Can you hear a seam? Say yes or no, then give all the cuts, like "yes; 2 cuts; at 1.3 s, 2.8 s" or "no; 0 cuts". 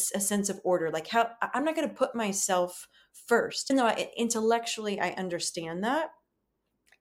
yes; 1 cut; at 3.7 s